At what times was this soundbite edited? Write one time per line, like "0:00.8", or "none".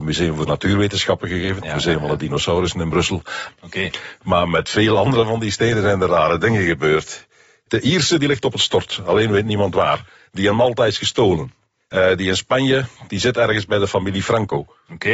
0:03.5